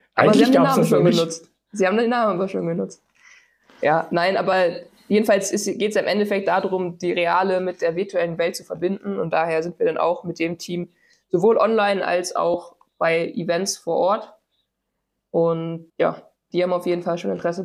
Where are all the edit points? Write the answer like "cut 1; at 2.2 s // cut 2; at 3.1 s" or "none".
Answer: cut 1; at 15.9 s